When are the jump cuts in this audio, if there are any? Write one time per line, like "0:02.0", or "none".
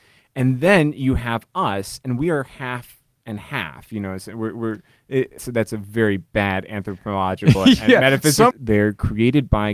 0:05.4
0:08.5

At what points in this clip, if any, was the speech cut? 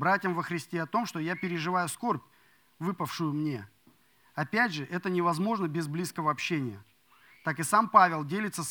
none

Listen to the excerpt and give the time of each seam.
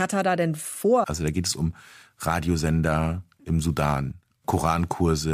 0:01.0

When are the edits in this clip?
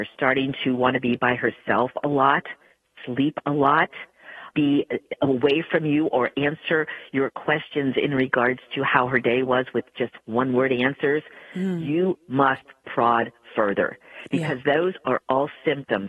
0:04.5

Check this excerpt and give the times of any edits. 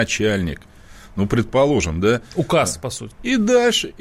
0:03.1

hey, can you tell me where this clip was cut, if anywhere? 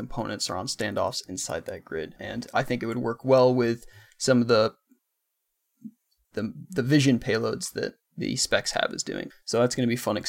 0:02.2
0:08.0
0:09.3

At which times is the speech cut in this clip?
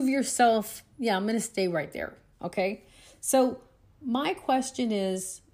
0:02.3

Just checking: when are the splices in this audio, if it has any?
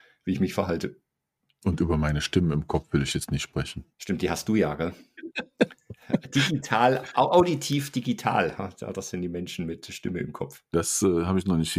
0:03.9
0:10.7

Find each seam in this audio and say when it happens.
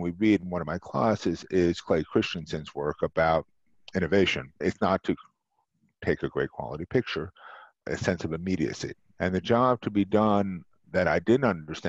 0:04.6
0:07.8
0:09.1

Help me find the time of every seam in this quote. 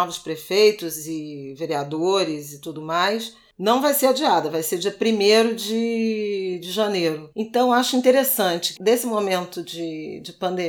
0:07.3
0:08.8

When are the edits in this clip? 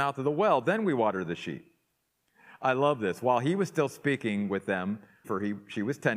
0:05.2

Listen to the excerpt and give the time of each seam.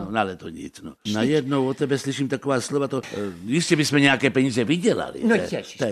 0:01.1
0:03.0

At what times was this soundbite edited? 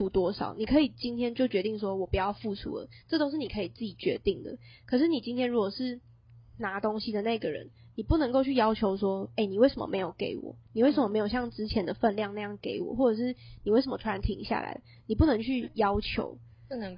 none

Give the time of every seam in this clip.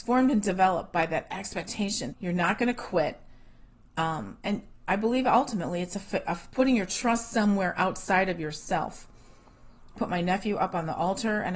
0:02.1
0:10.0

